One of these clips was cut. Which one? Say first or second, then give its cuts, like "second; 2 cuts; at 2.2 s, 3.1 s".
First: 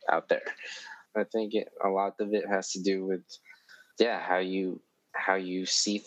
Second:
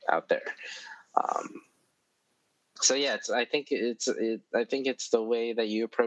first; 2 cuts; at 1.1 s, 3.9 s